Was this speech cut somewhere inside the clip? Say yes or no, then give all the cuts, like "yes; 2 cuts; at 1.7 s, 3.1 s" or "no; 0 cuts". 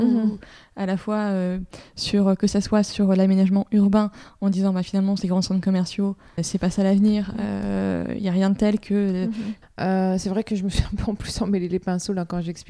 yes; 2 cuts; at 6.4 s, 9.6 s